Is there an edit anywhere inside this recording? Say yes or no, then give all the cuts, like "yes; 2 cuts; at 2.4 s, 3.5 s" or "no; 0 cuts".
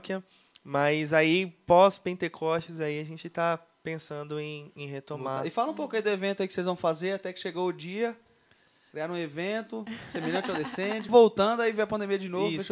yes; 1 cut; at 11.1 s